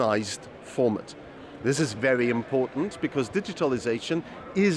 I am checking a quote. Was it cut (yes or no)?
yes